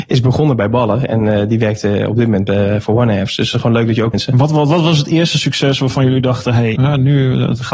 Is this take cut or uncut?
cut